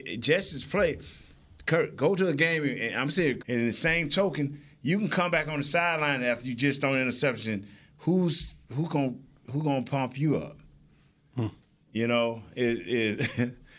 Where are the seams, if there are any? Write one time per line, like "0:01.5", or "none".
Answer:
0:03.4